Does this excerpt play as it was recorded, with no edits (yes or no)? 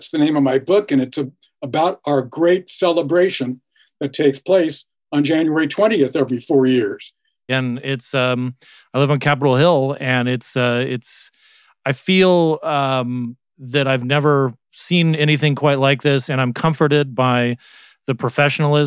no